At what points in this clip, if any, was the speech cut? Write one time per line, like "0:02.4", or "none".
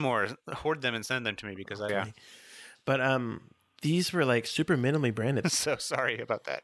0:01.9
0:05.4

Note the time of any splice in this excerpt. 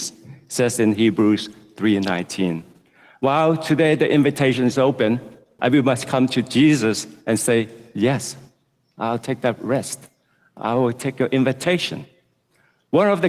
0:05.6

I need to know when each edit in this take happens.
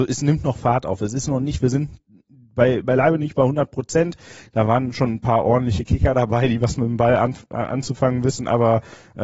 0:04.5

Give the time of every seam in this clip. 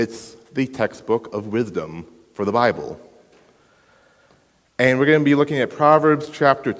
none

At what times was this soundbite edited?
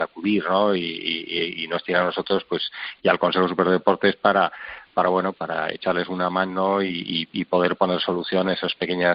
0:05.3

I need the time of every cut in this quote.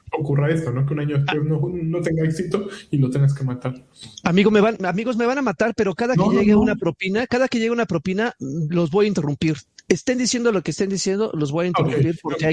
none

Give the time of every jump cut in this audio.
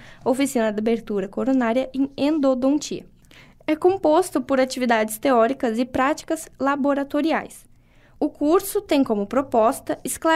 none

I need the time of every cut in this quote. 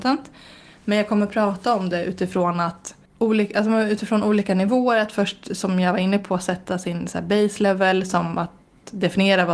0:03.1

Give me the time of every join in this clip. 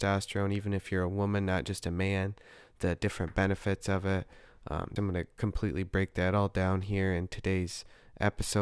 0:05.0

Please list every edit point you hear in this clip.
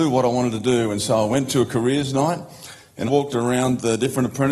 0:03.1

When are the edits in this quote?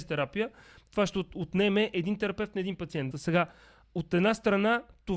0:03.1

